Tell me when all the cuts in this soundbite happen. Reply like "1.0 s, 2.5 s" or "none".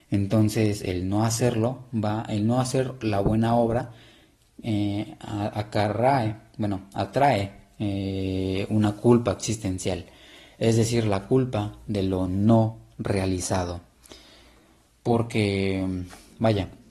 none